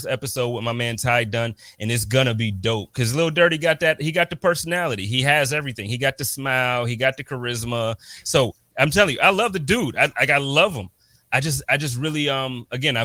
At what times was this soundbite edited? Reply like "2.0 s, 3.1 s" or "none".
none